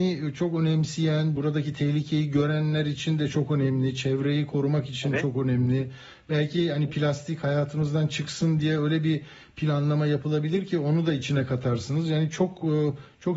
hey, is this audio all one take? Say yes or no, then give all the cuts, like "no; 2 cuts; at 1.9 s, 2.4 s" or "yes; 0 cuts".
yes; 0 cuts